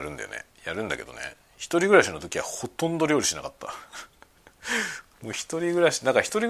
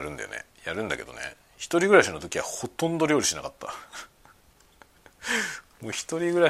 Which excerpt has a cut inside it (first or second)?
first